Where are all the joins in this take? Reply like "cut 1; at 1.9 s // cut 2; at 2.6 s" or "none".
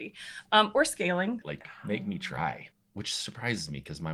cut 1; at 1.4 s // cut 2; at 2.7 s